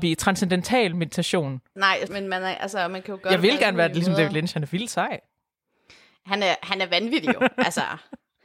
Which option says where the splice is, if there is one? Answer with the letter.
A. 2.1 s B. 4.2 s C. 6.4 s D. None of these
A